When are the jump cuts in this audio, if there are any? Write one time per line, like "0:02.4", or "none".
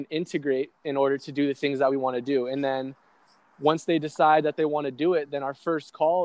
none